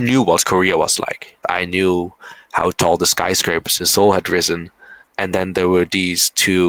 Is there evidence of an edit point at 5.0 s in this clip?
yes; 2 cuts; at 1.4 s, 5.0 s

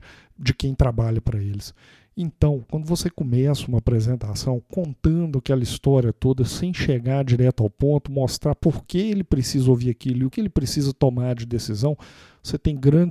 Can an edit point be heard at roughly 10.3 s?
yes; 1 cut; at 10.3 s

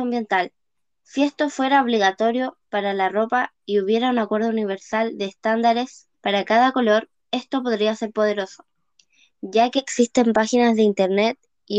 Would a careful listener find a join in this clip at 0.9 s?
no; 1 cut; at 6.1 s

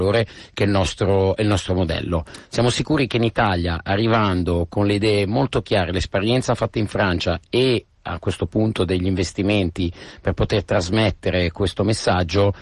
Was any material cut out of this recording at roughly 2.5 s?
no; 0 cuts

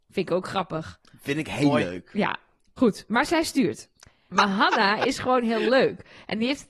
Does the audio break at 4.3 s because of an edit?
yes; 1 cut; at 4.3 s

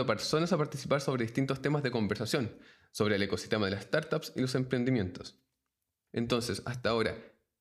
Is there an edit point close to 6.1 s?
yes; 1 cut; at 6.1 s

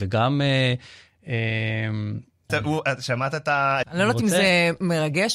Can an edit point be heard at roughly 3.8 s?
yes; 2 cuts; at 2.5 s, 3.8 s

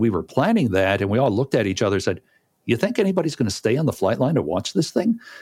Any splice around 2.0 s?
no; 0 cuts

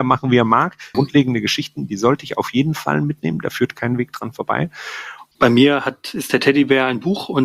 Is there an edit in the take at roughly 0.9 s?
yes; 2 cuts; at 0.9 s, 5.3 s

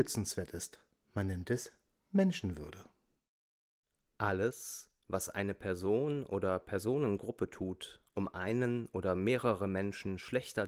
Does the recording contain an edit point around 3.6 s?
no; 0 cuts

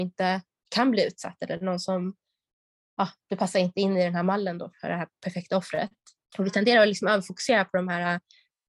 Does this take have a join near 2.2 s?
no; 1 cut; at 6.3 s

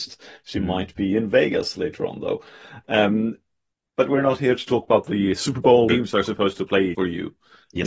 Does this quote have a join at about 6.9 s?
yes; 2 cuts; at 5.9 s, 6.9 s

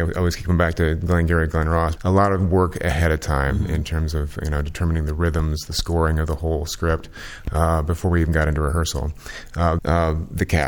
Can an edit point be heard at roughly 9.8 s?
yes; 2 cuts; at 2.0 s, 9.8 s

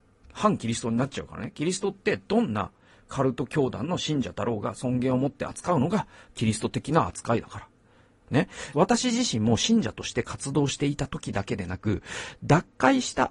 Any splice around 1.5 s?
no; 1 cut; at 8.7 s

